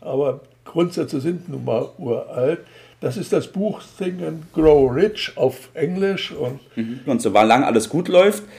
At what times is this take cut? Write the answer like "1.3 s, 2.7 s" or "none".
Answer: 7.1 s